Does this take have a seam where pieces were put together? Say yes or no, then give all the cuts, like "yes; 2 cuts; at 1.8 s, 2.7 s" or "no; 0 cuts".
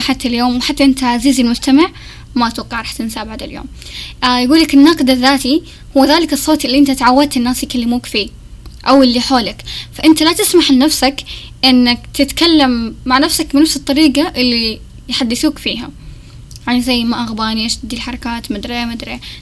no; 0 cuts